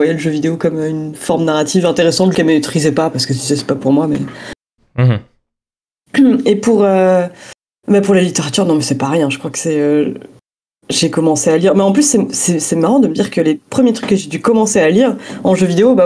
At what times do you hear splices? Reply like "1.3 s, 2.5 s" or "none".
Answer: 2.3 s